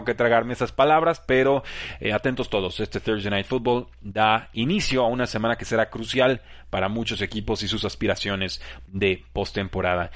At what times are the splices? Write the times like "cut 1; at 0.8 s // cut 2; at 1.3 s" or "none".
none